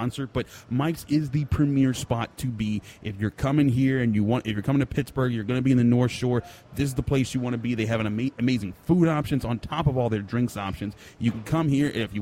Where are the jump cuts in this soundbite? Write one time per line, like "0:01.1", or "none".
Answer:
none